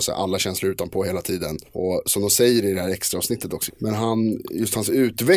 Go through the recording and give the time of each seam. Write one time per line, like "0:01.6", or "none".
0:01.7
0:03.7